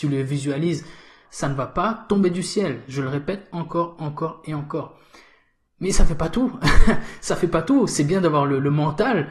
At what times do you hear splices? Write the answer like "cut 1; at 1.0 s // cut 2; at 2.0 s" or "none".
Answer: cut 1; at 1.2 s // cut 2; at 5.7 s